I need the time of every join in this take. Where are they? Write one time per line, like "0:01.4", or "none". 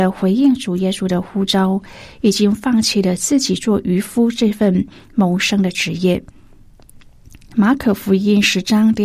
none